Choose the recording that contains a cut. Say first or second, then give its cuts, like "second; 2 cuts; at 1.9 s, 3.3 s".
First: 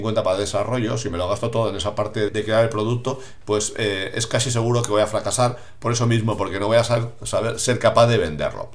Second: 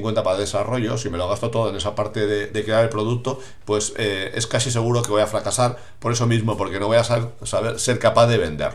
first; 1 cut; at 2.3 s